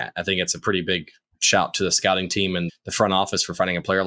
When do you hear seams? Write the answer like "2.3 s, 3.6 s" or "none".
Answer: 1.3 s, 2.7 s